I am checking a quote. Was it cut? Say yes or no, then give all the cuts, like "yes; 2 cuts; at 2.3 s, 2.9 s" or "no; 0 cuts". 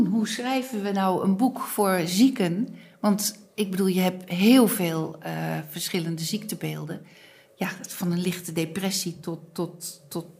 no; 0 cuts